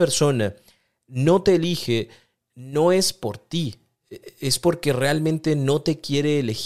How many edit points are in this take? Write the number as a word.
zero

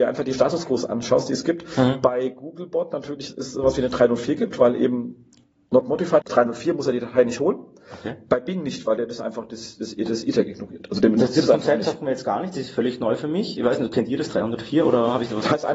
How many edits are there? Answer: one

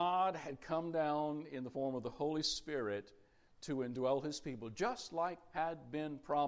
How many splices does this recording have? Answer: zero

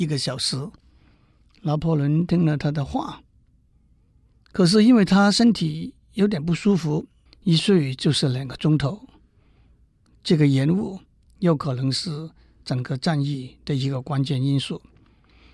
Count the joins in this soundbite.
one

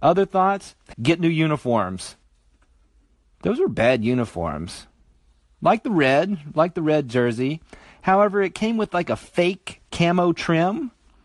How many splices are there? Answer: one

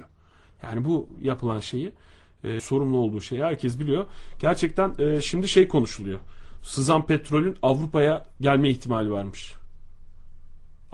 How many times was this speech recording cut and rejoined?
one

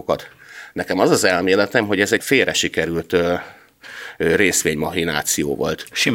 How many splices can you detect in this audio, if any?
one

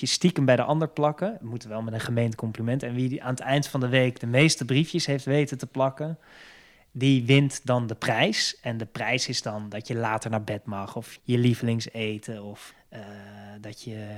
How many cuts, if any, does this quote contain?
two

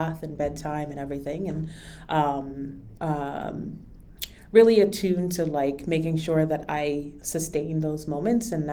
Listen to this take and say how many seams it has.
one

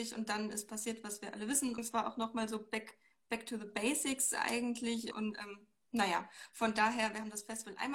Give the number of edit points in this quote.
two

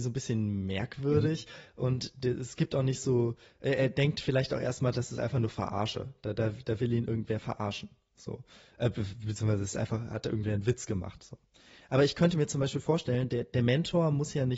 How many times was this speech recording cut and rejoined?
zero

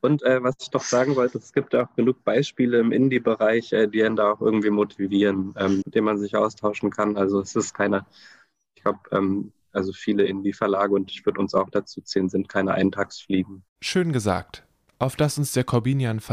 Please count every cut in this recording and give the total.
one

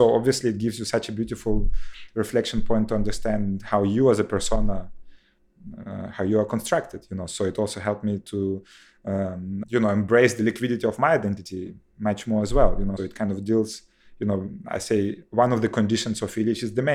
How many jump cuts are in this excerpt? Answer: two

